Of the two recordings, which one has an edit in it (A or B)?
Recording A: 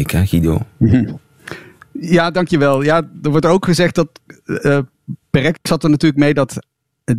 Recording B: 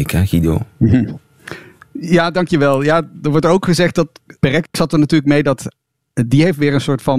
B